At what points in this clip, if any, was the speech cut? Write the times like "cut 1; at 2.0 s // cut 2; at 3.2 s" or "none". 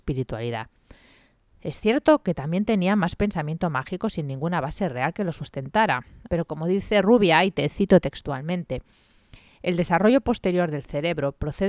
cut 1; at 6.3 s